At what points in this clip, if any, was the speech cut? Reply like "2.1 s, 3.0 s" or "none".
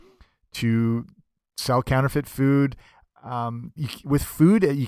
3.8 s